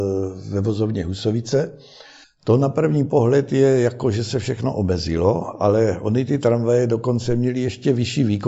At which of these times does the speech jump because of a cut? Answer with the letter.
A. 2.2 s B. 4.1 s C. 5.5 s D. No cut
A